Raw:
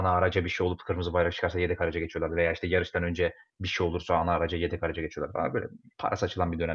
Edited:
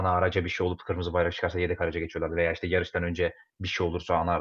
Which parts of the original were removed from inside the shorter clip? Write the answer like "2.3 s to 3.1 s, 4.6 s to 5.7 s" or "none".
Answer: none